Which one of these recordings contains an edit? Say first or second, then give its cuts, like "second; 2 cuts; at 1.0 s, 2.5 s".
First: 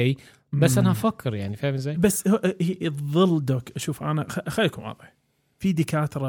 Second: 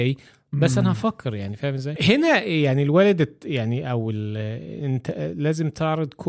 second; 1 cut; at 2.0 s